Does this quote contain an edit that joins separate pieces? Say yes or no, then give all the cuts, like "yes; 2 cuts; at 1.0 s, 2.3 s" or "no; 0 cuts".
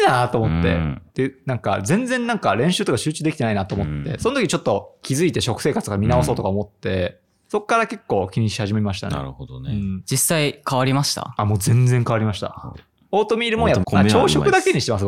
yes; 3 cuts; at 1.1 s, 12.7 s, 13.8 s